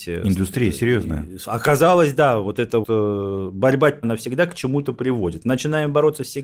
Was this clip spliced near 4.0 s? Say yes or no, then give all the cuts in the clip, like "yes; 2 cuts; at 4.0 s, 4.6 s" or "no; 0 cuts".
yes; 2 cuts; at 2.8 s, 4.0 s